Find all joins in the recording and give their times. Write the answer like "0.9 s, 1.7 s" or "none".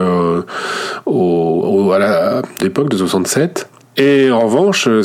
2.6 s, 3.8 s